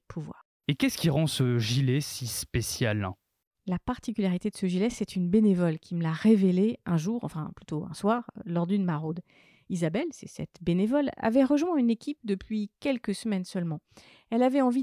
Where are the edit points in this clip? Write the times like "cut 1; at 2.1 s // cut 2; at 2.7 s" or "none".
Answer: none